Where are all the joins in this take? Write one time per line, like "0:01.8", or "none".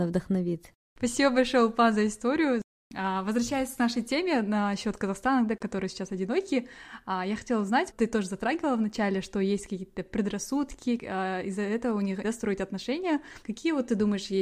0:07.9
0:11.0
0:12.2